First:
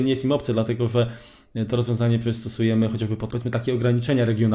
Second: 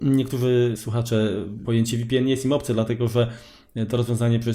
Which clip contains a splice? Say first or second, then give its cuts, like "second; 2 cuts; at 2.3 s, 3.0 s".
first; 1 cut; at 3.3 s